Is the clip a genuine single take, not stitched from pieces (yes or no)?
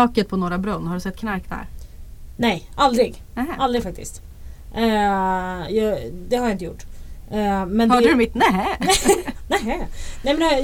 yes